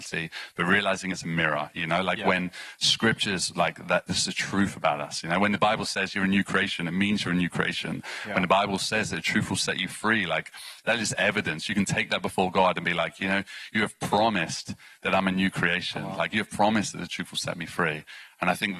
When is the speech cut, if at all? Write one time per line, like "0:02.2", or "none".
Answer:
none